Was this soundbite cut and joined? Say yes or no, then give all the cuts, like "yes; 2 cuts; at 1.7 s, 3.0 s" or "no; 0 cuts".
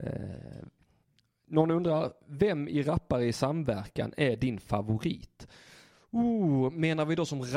no; 0 cuts